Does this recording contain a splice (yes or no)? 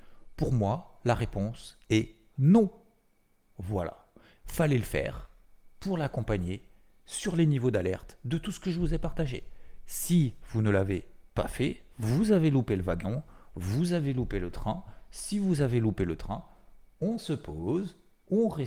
no